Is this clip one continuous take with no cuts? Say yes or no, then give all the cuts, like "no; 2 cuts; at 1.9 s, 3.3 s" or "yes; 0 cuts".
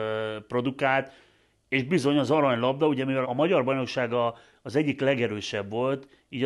no; 1 cut; at 3.2 s